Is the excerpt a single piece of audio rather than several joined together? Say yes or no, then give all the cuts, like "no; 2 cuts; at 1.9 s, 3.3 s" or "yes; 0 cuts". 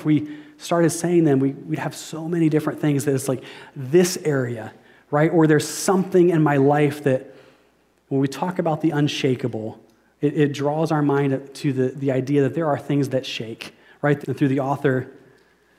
no; 1 cut; at 14.2 s